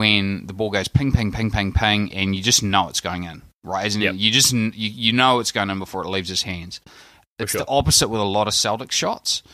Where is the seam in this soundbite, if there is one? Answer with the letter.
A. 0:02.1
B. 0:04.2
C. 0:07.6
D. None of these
A